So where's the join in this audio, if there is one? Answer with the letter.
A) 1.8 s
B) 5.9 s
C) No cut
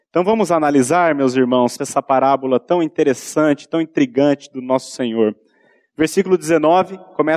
A